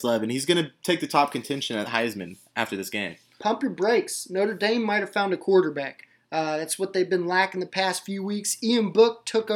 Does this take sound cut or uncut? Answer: uncut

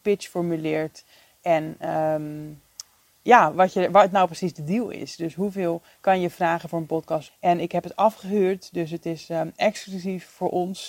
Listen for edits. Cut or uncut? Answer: cut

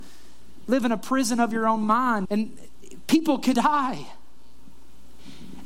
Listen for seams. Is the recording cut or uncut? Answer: cut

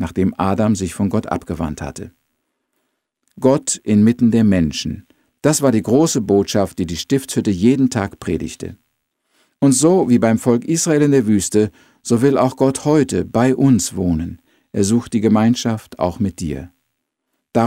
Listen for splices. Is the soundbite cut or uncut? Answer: uncut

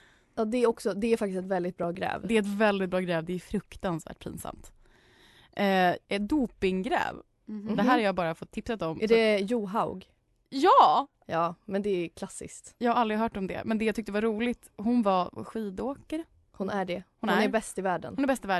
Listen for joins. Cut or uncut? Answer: cut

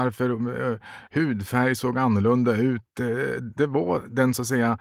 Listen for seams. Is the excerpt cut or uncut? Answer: cut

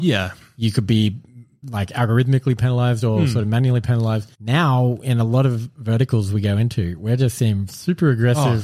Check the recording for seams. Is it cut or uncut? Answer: cut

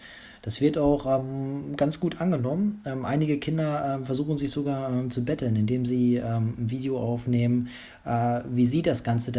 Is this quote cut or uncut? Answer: uncut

